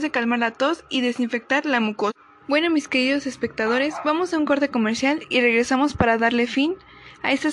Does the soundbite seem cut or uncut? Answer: cut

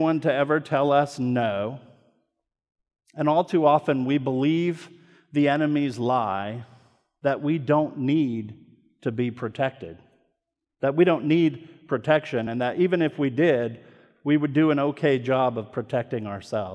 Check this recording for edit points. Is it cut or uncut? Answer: uncut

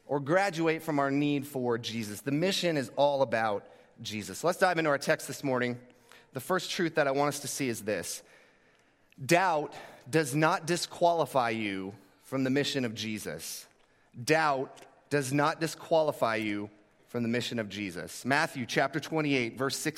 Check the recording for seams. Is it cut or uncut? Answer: uncut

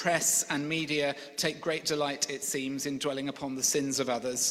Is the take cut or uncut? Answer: uncut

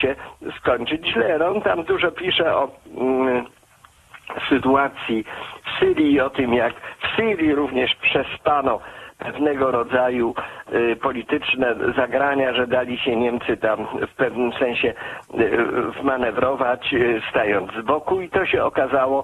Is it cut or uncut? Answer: uncut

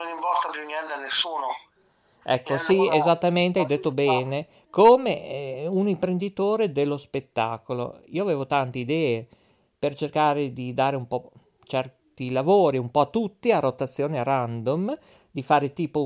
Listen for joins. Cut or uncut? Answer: uncut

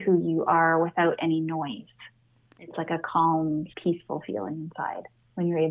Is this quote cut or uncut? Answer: cut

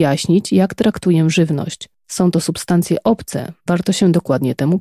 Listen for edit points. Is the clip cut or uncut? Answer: uncut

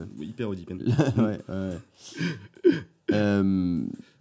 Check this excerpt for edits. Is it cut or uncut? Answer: uncut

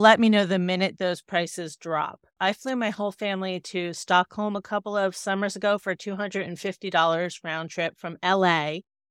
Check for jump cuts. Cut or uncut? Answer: cut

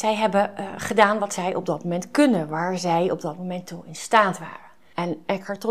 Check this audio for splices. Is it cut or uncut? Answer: uncut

